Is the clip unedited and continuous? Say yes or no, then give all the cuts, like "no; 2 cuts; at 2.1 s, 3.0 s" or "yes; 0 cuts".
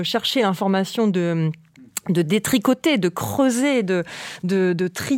yes; 0 cuts